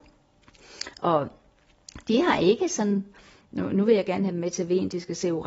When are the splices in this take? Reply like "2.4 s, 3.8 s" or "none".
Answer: none